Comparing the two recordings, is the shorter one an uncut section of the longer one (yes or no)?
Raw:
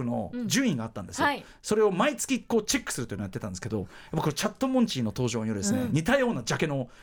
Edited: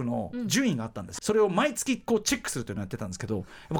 no